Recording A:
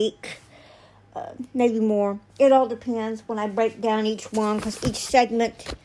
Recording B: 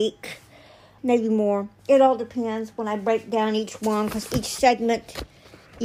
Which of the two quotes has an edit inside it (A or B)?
B